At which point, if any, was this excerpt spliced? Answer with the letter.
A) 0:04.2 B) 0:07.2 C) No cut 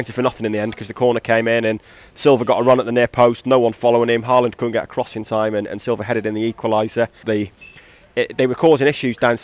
B